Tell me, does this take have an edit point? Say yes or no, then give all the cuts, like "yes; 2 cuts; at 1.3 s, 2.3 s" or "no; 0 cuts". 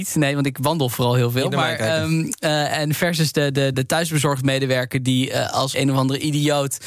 yes; 2 cuts; at 3.7 s, 5.7 s